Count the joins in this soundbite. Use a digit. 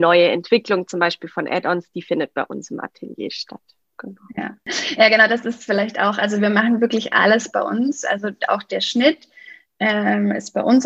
0